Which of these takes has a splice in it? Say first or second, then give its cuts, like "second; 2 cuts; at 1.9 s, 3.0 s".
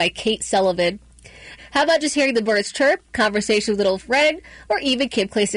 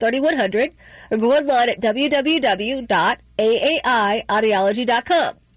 first; 2 cuts; at 1.6 s, 3.1 s